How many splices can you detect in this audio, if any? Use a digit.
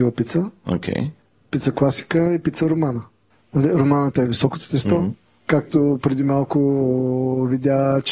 0